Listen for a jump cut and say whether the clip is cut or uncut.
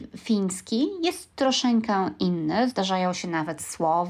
uncut